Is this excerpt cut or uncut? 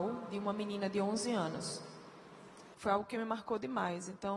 cut